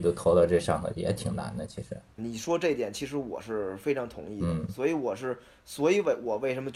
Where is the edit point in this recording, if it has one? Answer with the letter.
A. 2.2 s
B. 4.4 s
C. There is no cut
A